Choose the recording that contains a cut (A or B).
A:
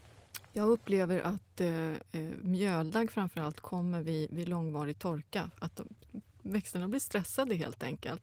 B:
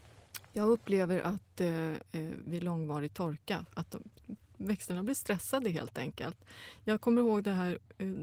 B